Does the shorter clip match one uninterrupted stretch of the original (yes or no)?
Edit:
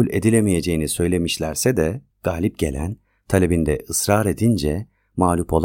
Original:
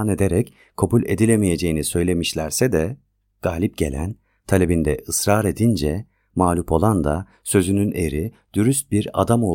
no